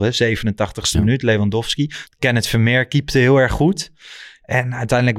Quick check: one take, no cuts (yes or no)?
no